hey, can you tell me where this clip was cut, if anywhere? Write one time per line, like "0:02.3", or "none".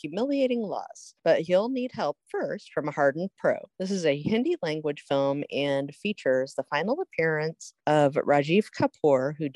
none